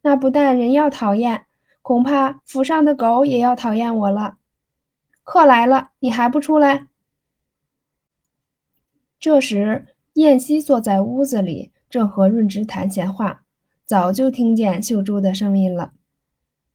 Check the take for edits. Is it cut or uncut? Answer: cut